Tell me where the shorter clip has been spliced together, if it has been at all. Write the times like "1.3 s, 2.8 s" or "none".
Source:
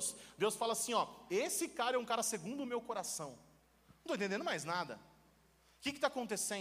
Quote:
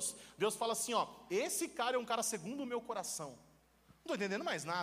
none